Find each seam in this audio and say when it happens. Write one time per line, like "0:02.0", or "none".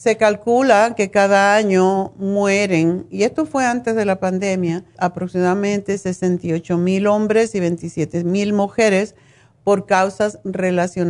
0:05.0